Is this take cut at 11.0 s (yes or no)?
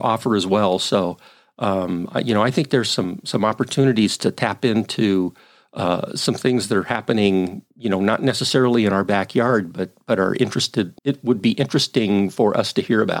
yes